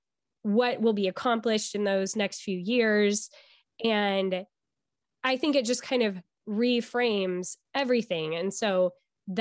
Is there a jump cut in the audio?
no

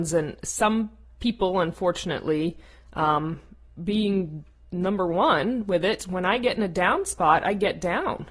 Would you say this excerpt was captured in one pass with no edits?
no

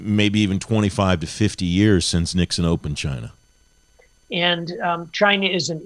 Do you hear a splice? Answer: yes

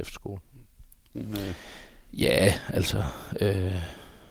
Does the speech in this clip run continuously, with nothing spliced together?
no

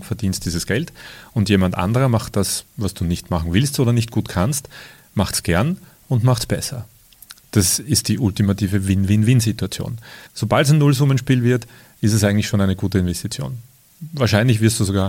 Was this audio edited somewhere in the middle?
yes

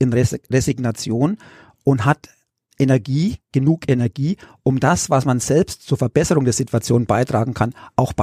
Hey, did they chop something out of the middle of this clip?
no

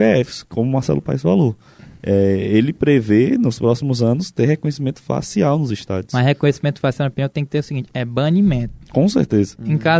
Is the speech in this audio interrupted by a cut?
no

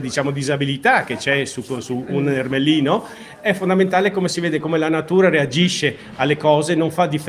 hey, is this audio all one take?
yes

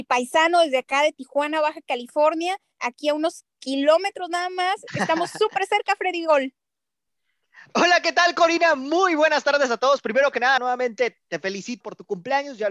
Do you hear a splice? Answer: yes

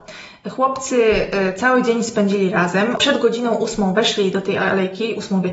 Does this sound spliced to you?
no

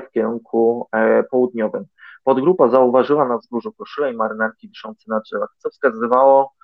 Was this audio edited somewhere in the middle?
no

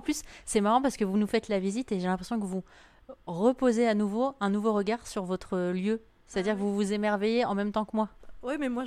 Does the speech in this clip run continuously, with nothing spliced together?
yes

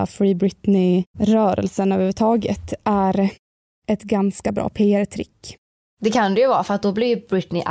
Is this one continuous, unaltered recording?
yes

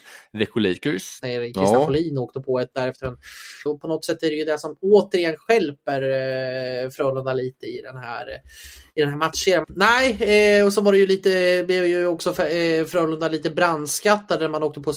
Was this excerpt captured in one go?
no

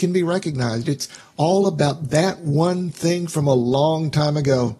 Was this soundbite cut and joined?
no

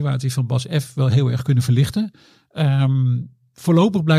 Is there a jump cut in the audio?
no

